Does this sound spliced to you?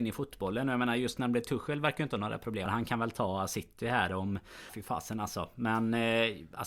yes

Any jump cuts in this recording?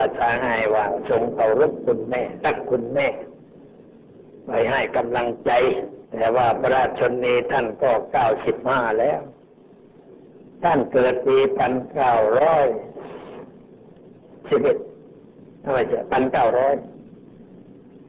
yes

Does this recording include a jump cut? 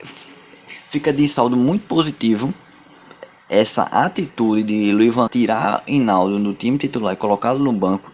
yes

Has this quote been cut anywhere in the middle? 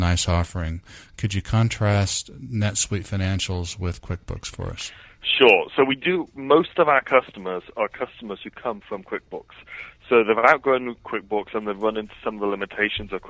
no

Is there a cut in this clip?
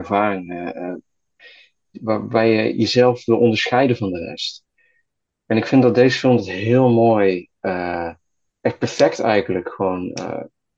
no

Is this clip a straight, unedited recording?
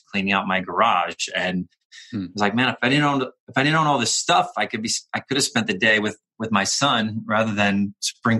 yes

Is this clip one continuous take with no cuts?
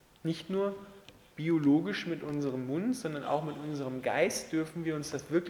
yes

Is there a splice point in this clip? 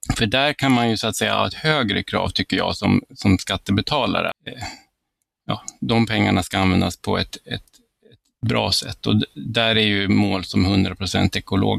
yes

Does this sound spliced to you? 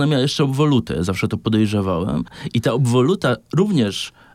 no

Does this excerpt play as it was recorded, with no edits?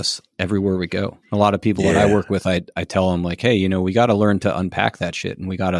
no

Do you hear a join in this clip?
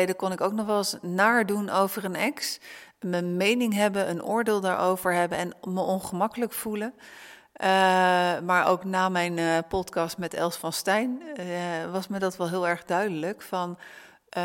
no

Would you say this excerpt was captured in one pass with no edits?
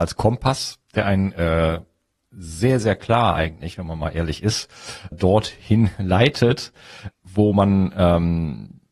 no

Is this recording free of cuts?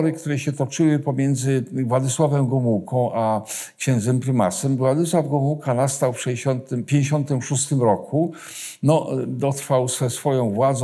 yes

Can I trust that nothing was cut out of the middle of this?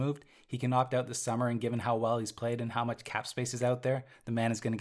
yes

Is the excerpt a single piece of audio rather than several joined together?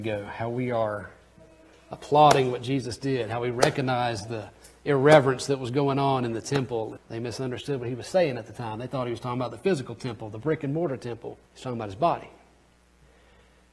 no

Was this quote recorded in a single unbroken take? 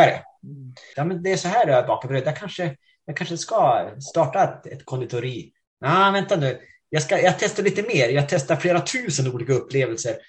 no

